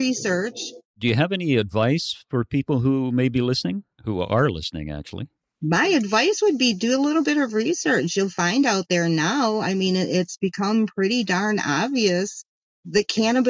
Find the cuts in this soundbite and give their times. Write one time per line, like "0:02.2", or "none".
0:00.9